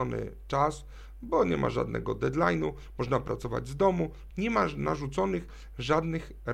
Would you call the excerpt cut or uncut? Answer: cut